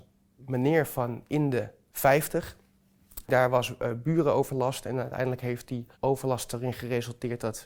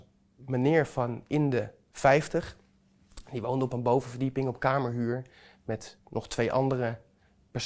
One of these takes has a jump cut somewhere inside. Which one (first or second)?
first